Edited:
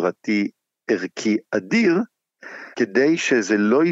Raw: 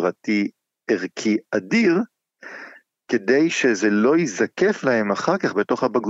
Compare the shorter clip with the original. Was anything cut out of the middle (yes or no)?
yes